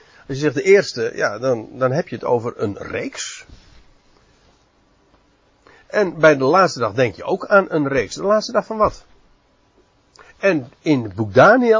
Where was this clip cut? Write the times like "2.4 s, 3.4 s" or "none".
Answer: none

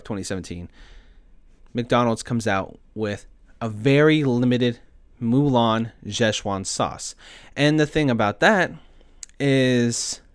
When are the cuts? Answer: none

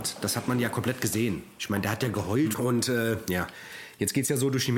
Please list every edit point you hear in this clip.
2.5 s

